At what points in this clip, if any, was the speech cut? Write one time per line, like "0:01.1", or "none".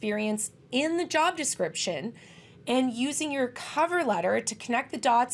none